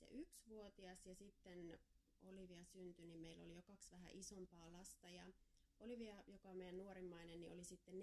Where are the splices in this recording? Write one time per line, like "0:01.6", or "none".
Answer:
none